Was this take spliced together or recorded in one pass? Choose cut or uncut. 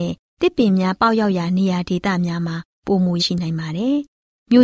cut